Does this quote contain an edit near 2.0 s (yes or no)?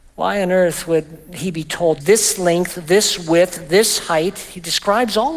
yes